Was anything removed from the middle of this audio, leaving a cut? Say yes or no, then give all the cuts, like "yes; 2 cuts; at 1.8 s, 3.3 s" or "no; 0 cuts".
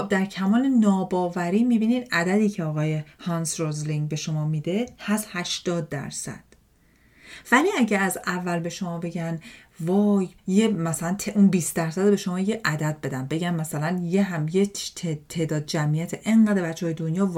yes; 1 cut; at 10.4 s